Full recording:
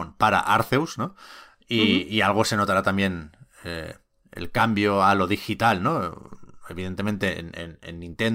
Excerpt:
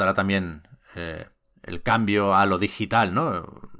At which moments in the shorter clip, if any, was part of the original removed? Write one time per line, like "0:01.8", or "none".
none